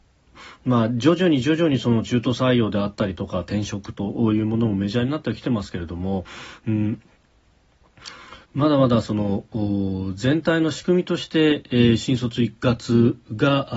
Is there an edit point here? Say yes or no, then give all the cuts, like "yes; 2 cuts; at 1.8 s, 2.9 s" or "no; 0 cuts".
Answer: no; 0 cuts